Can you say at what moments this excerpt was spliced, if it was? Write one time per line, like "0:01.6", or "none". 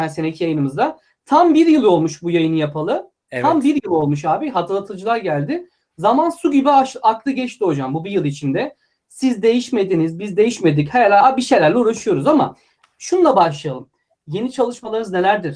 none

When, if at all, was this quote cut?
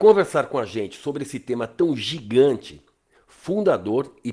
0:03.1

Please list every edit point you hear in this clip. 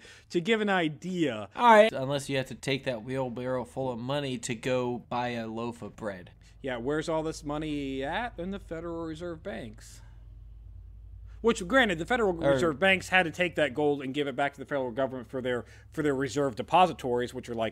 0:01.9

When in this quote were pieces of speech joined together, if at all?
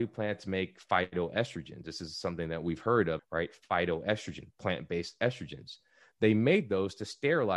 0:03.2

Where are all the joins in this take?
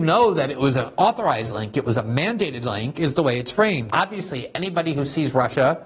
0:03.9

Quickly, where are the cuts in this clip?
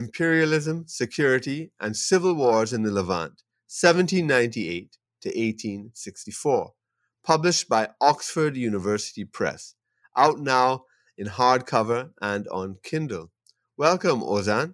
none

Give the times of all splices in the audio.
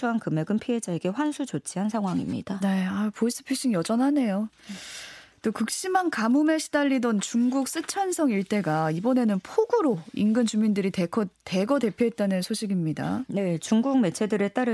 none

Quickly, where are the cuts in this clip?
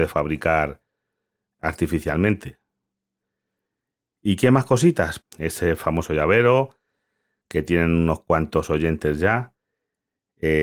0:05.2

